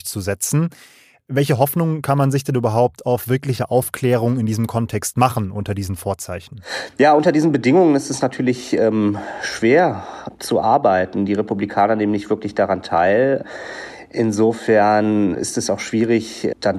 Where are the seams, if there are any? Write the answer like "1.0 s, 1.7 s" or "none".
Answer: 15.3 s